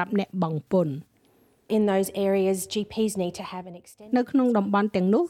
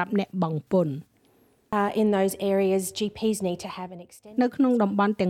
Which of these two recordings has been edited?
first; 1 cut; at 1.7 s

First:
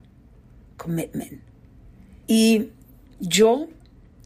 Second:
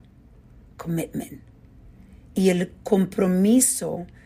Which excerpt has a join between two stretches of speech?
first; 1 cut; at 2.2 s

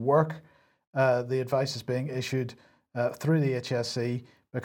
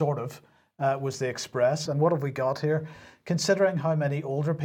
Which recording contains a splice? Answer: second; 1 cut; at 1.9 s

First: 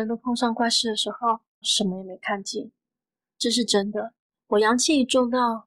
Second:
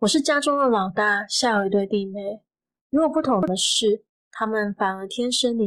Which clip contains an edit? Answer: first; 1 cut; at 1.6 s

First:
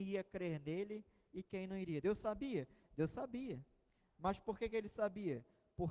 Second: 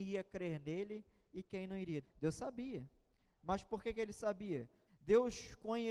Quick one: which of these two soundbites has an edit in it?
second; 2 cuts; at 2.0 s, 4.9 s

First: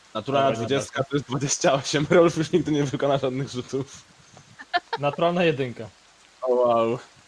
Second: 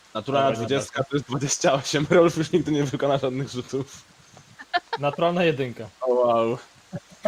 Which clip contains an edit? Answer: second; 1 cut; at 6.0 s

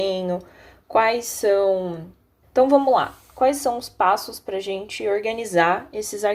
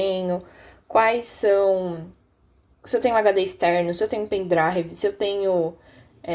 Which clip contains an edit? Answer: first; 1 cut; at 2.4 s

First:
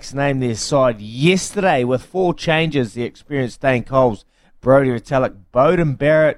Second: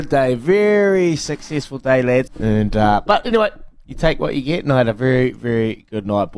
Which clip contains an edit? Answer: second; 1 cut; at 2.3 s

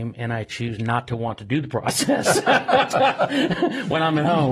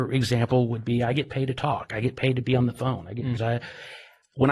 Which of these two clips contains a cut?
second; 1 cut; at 3.4 s

